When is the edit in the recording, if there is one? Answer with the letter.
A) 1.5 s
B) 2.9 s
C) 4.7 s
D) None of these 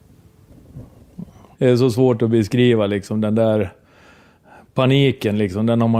A